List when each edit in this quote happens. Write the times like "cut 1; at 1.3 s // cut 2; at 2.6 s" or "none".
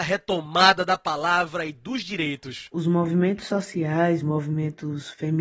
cut 1; at 4.2 s